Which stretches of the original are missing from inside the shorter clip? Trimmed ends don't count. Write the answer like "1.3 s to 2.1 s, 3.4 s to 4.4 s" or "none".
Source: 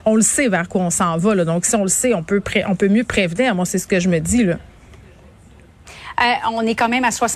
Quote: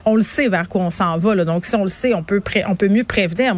none